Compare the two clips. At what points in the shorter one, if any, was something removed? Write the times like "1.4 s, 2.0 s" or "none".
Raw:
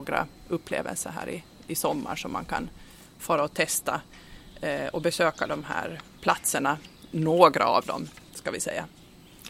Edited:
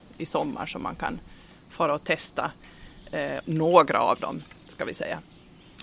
3.4 s